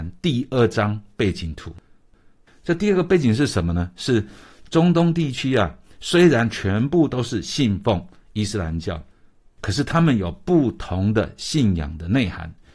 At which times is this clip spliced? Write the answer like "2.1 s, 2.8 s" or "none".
none